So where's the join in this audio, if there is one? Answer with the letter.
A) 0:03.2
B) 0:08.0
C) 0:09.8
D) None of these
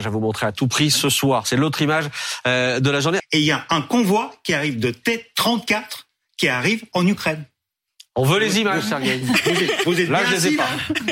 A